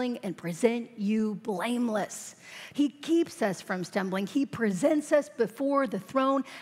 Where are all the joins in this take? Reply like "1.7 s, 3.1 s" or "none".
2.7 s